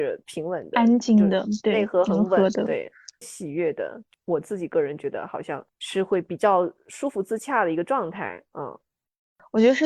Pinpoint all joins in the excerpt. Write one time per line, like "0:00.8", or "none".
0:03.2